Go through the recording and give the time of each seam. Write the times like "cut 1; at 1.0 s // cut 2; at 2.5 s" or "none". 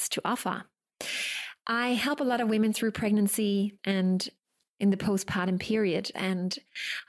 cut 1; at 3.8 s // cut 2; at 6.1 s